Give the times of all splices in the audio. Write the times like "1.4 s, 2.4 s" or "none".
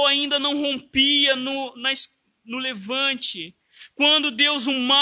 none